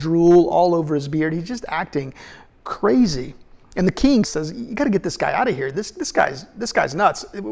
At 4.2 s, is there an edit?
yes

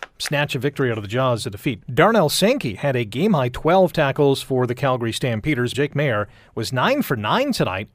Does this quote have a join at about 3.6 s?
no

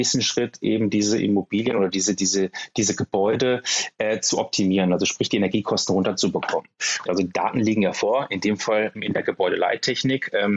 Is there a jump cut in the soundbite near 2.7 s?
no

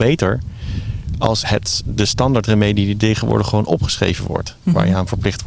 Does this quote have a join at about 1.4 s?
yes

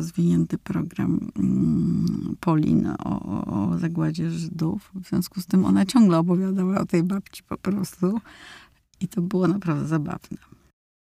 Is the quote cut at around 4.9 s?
no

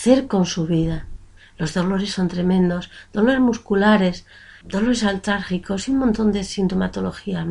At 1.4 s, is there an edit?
yes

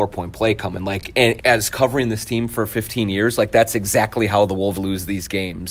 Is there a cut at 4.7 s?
yes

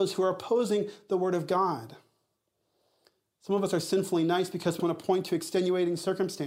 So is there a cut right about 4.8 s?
yes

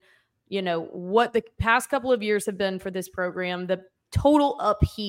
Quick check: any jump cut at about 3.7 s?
no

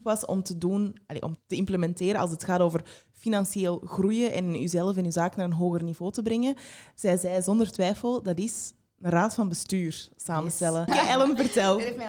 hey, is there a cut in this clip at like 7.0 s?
no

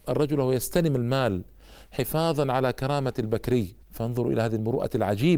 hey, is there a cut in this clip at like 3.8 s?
yes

